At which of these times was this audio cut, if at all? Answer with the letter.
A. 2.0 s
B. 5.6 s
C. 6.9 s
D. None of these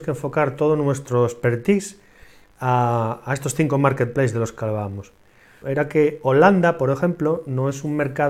B